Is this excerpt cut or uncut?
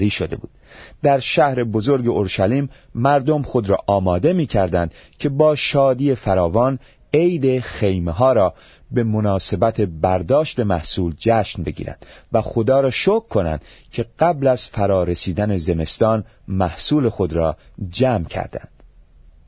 uncut